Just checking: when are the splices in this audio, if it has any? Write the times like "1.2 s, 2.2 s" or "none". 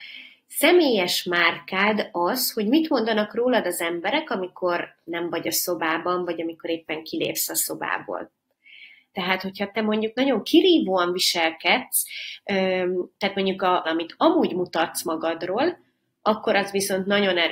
9.1 s, 13.8 s

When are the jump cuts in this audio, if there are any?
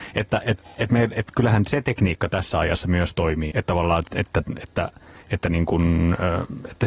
3.5 s

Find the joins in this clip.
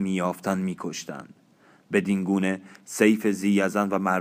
none

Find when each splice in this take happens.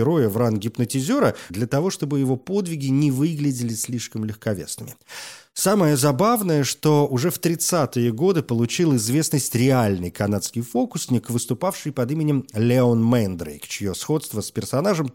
1.5 s

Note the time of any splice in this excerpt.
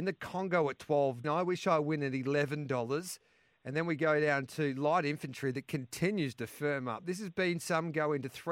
1.2 s

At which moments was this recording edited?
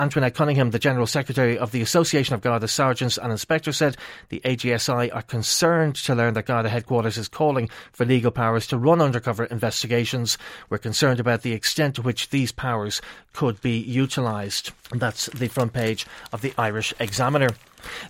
14.8 s

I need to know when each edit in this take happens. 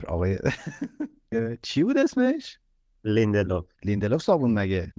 1.3 s

